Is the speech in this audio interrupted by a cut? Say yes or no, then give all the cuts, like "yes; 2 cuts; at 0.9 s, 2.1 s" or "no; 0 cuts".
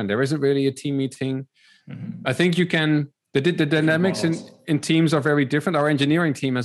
no; 0 cuts